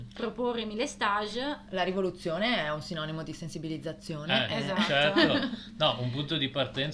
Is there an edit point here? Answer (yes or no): no